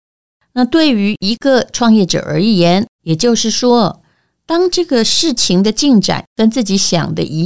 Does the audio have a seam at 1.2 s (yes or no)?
no